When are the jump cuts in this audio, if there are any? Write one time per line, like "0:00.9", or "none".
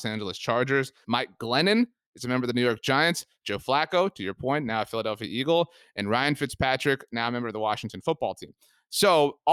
0:01.0